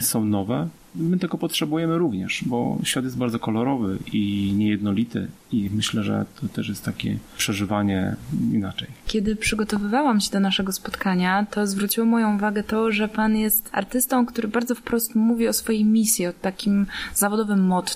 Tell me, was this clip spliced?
no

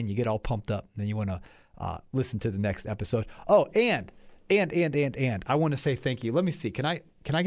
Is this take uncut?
yes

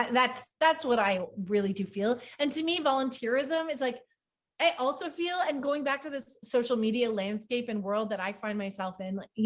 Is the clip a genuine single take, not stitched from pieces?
yes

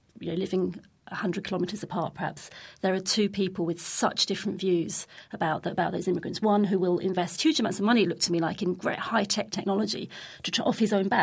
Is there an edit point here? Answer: no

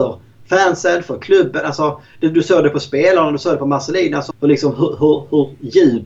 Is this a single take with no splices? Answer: no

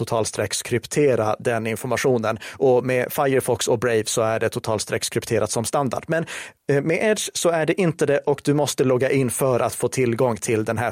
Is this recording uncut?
yes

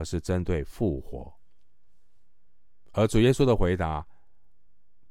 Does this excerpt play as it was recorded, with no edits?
yes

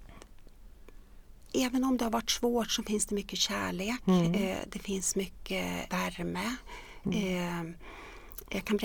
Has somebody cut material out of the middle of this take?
yes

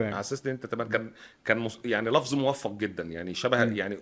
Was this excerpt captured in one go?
yes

